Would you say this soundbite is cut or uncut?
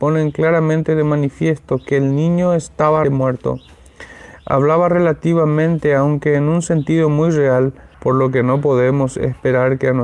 cut